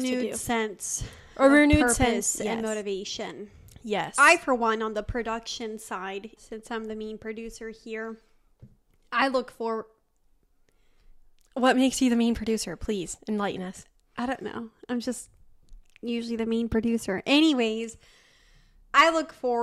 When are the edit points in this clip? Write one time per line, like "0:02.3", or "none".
0:06.4